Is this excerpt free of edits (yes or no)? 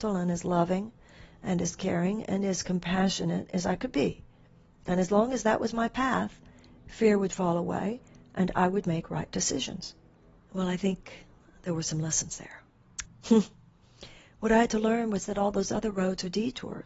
no